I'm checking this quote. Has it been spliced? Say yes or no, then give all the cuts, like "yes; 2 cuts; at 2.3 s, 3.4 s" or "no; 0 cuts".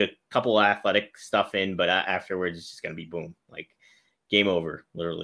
yes; 1 cut; at 2.0 s